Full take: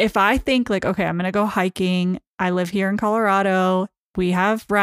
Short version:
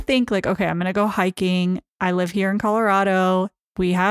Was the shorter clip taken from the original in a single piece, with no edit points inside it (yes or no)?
yes